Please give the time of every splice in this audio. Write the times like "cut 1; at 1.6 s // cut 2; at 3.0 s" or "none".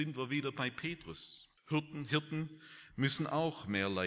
cut 1; at 1.6 s